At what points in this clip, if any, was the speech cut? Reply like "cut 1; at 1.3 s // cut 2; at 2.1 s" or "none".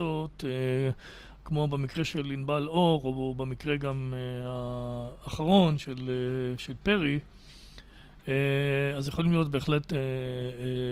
none